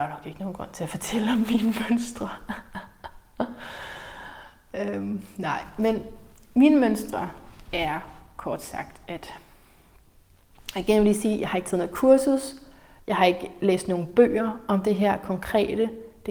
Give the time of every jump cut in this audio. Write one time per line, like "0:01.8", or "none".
none